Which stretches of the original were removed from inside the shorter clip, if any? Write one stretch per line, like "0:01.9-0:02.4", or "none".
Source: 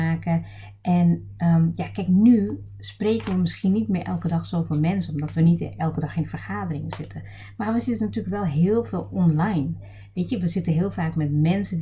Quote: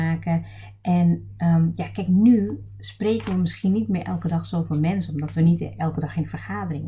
none

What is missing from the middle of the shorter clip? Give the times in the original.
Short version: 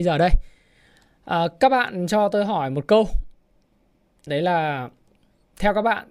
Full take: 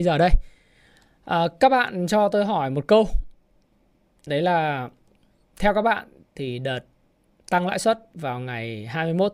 none

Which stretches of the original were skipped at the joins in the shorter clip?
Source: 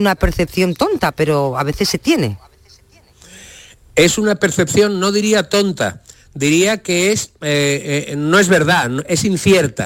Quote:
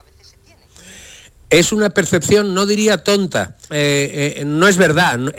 0:06.1-0:07.4

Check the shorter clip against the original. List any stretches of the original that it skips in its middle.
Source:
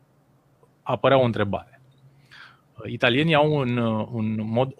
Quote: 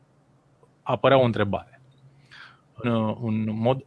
0:02.8-0:03.7

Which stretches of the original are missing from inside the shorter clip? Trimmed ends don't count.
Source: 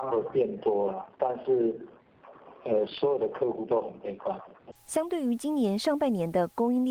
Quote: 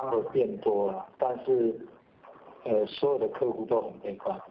none

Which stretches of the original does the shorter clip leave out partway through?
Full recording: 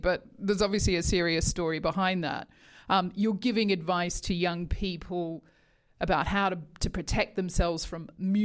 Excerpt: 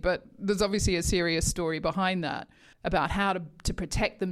0:02.7-0:05.9

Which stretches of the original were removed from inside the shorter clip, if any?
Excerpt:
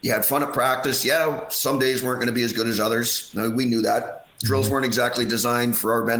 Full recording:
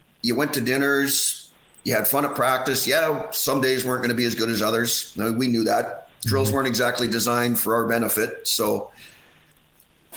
none

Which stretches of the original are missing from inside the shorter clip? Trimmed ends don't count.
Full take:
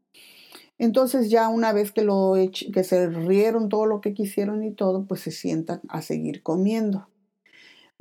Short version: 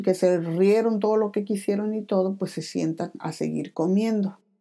none

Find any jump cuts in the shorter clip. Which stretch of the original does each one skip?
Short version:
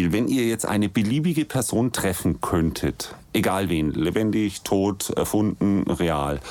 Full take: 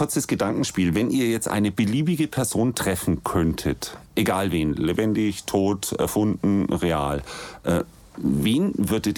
none

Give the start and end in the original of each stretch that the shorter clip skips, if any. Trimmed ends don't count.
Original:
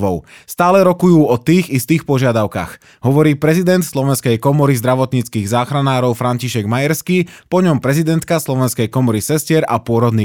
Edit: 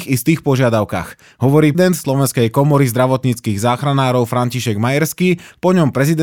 0:03.4-0:03.6

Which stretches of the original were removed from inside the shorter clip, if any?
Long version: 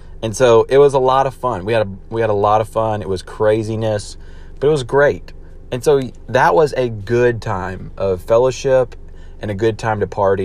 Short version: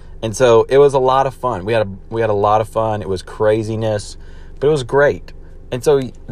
none

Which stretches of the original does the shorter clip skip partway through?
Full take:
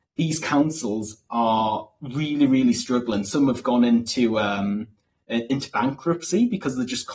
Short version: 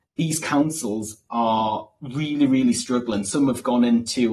none

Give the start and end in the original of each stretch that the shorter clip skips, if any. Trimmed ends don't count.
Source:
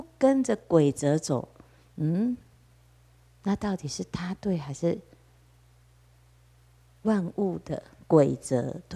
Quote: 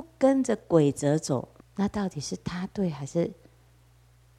0:01.6-0:03.3

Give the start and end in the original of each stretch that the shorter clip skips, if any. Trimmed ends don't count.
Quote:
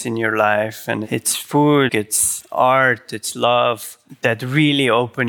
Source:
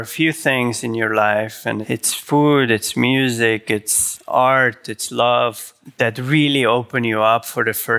0:02.7-0:03.6

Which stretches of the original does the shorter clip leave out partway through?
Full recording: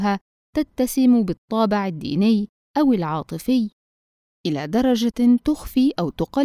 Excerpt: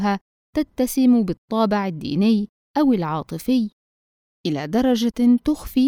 none

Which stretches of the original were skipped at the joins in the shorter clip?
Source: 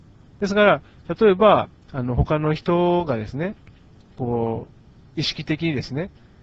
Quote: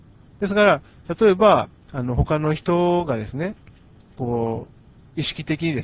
none

